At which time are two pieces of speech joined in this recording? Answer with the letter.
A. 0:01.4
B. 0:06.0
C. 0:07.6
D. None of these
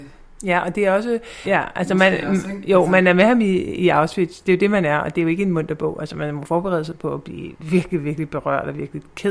A